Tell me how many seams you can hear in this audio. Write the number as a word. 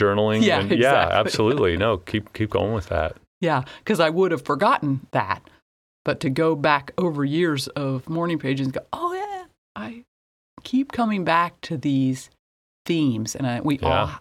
one